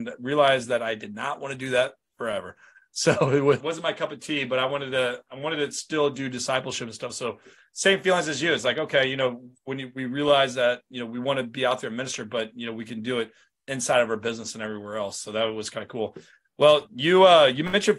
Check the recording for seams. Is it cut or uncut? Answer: cut